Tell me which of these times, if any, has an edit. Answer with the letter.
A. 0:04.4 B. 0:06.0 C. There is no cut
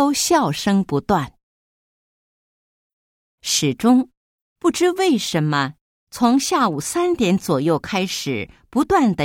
A